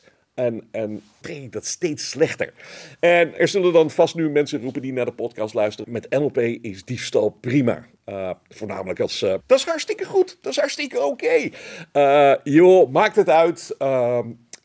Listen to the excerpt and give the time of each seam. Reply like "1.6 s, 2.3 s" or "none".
1.2 s, 5.8 s, 9.4 s

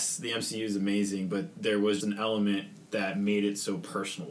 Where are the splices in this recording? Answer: 2.0 s

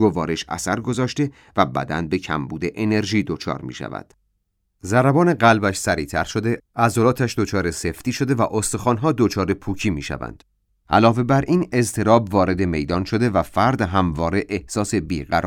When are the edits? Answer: 4.6 s, 10.8 s

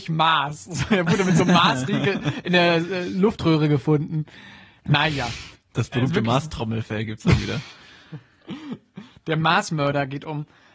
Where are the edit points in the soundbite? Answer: none

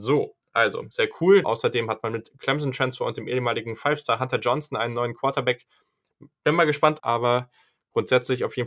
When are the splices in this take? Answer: 1.4 s, 7.0 s

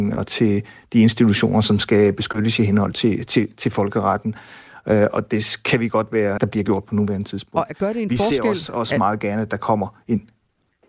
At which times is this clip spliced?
6.4 s

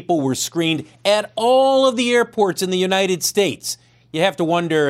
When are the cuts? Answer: none

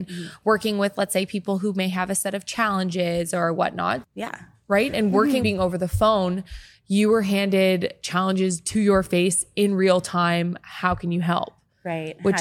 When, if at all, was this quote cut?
4.0 s, 5.4 s

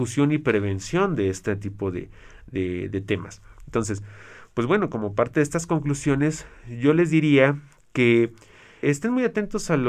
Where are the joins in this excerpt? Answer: 8.8 s

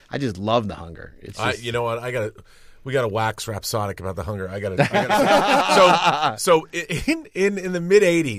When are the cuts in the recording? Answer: none

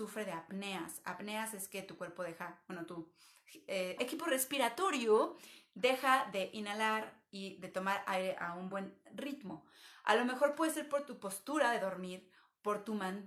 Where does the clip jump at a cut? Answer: 4.0 s

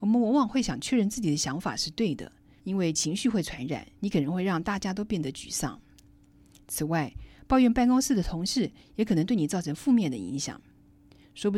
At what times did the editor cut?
2.6 s, 4.0 s

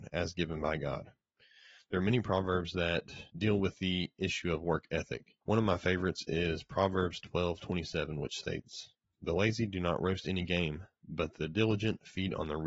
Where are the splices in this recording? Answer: 5.4 s

